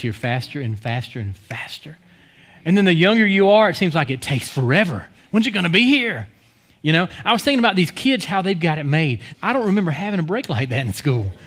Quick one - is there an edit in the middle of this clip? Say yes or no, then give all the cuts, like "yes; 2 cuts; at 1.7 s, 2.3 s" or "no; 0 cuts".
yes; 1 cut; at 9.3 s